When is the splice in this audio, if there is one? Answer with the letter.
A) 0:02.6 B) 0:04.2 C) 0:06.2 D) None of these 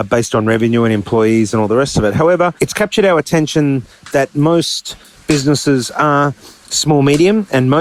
A